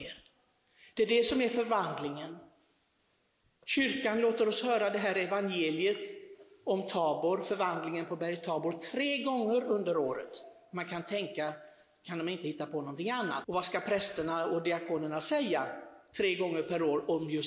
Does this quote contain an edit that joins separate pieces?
yes; 1 cut; at 13.4 s

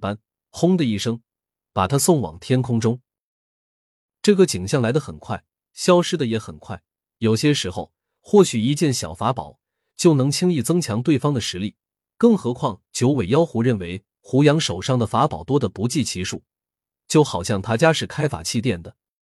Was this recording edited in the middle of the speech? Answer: yes; 1 cut; at 7.1 s

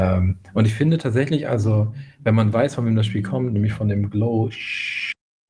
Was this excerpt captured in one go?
yes; 0 cuts

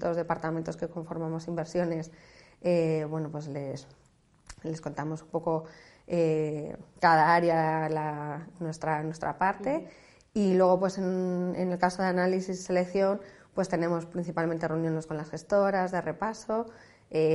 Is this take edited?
no; 0 cuts

